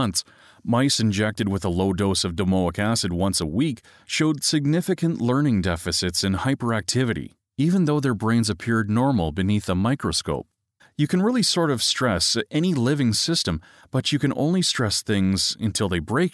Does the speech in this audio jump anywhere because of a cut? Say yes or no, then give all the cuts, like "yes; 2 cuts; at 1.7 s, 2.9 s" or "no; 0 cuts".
yes; 1 cut; at 10.8 s